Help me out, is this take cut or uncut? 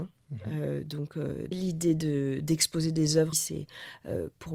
cut